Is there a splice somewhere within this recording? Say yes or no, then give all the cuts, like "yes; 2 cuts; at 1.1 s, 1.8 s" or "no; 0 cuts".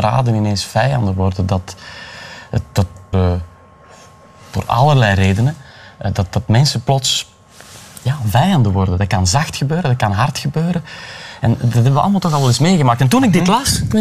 yes; 1 cut; at 3.1 s